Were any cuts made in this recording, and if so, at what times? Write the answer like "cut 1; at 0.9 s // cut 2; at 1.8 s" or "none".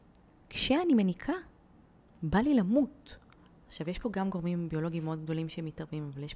cut 1; at 3.5 s